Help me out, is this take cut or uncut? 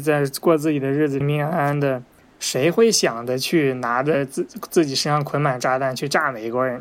cut